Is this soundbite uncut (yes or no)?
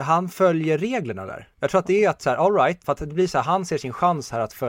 no